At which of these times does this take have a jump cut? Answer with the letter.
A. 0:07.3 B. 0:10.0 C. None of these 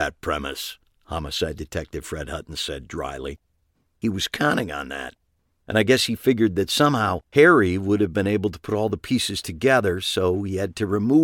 A